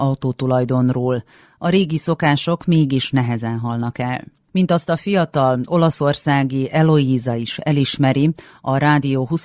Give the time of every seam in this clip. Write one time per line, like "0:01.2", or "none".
none